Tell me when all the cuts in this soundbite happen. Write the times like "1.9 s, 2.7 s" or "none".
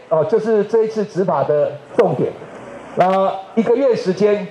none